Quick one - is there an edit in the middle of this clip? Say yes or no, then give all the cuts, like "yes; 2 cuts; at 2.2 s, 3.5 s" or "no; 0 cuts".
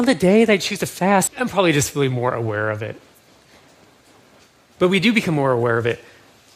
yes; 1 cut; at 1.3 s